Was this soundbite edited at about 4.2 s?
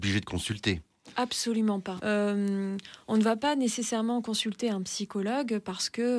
no; 1 cut; at 2.0 s

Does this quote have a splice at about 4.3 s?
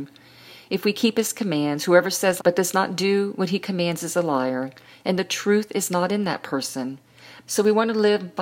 no; 2 cuts; at 2.4 s, 7.4 s

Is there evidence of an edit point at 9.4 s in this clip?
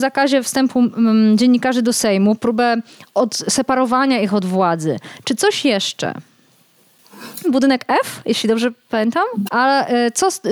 yes; 2 cuts; at 7.4 s, 9.4 s

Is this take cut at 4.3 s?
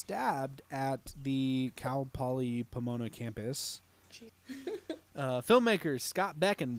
yes; 1 cut; at 4.3 s

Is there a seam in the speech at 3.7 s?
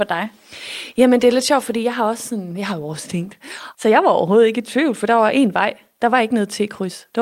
yes; 1 cut; at 3.7 s

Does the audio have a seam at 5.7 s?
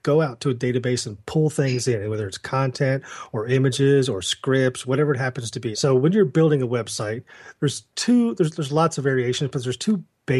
yes; 1 cut; at 5.7 s

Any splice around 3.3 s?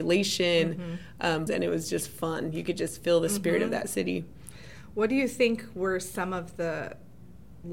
no; 1 cut; at 1.5 s

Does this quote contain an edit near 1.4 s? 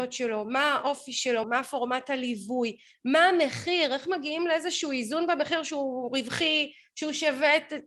yes; 1 cut; at 1.4 s

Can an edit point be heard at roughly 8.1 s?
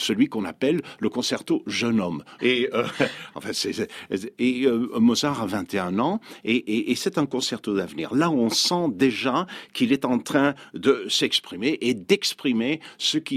no; 1 cut; at 2.4 s

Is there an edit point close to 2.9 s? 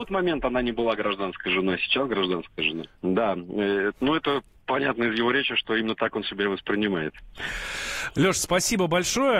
yes; 1 cut; at 2.9 s

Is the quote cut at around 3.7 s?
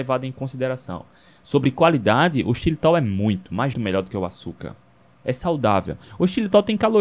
yes; 1 cut; at 3.7 s

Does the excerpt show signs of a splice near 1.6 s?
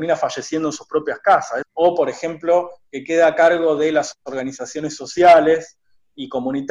yes; 1 cut; at 1.6 s

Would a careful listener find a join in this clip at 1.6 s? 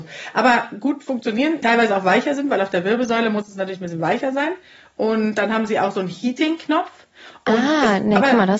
yes; 1 cut; at 1.6 s

